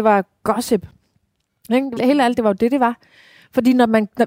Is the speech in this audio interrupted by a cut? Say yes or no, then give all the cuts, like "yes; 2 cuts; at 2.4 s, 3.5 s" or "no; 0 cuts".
yes; 1 cut; at 2.0 s